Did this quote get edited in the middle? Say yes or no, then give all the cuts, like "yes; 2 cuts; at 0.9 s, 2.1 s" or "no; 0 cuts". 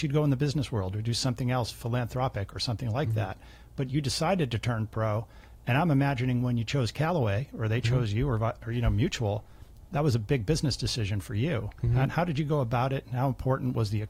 no; 0 cuts